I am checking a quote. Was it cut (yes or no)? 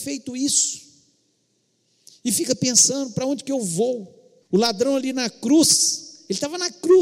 yes